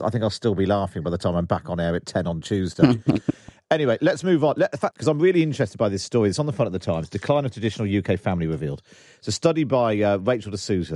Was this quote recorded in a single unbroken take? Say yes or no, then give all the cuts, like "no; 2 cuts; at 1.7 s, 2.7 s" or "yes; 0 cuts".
no; 1 cut; at 4.9 s